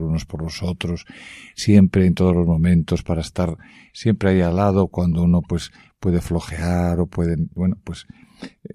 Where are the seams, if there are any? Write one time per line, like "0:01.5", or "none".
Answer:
none